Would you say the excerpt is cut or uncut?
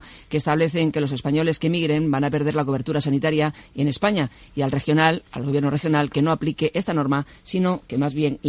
uncut